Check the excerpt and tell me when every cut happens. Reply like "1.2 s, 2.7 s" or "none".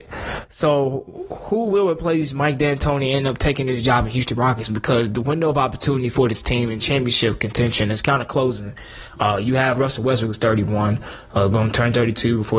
none